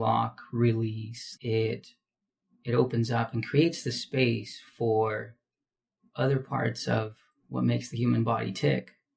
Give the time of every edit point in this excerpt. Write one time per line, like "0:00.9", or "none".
0:01.4